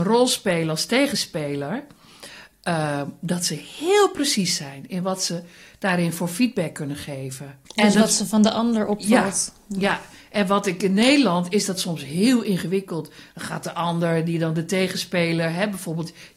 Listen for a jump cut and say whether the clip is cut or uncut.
cut